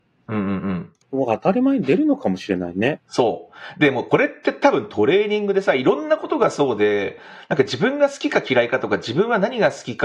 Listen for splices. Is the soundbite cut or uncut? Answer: cut